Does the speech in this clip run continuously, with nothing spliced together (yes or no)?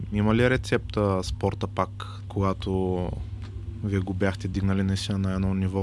no